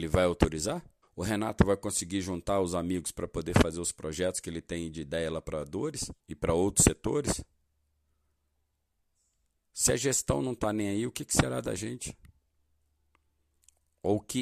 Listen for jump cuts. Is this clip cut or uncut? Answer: cut